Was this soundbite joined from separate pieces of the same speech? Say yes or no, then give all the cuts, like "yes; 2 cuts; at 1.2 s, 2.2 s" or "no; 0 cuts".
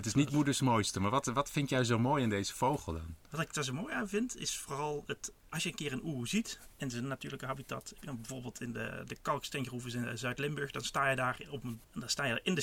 no; 0 cuts